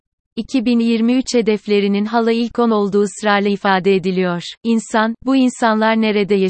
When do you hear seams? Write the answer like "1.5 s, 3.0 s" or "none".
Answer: 4.6 s